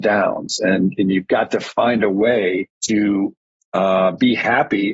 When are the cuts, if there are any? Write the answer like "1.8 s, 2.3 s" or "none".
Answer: 2.7 s